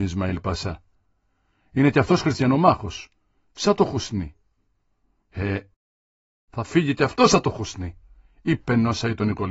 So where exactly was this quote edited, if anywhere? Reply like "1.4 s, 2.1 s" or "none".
none